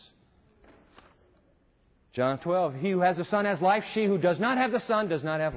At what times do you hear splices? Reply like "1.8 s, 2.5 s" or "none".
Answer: 2.4 s